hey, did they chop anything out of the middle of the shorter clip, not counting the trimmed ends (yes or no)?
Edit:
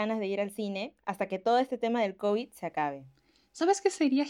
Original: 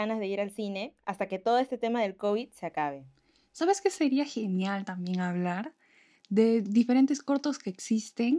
no